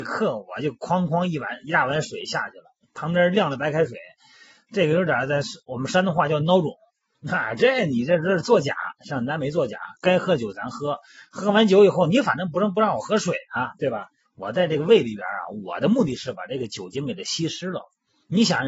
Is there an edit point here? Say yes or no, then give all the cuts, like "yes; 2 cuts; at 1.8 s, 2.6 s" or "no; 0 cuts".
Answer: yes; 1 cut; at 1.1 s